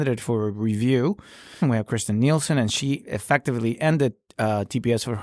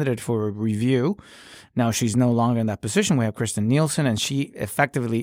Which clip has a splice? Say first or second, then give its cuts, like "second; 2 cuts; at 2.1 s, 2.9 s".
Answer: first; 1 cut; at 1.6 s